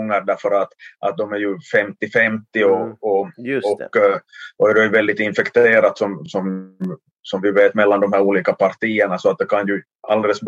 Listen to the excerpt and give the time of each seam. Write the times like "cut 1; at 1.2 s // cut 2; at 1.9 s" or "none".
none

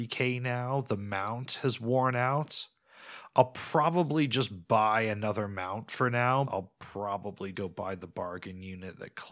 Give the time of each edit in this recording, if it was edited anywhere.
cut 1; at 6.5 s // cut 2; at 7.5 s

